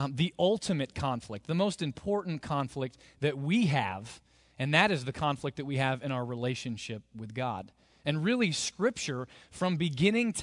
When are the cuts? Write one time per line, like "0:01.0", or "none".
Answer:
none